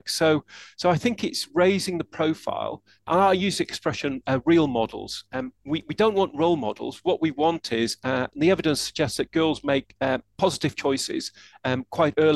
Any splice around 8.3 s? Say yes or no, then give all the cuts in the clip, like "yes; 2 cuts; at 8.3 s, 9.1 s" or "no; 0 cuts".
yes; 2 cuts; at 5.6 s, 8.3 s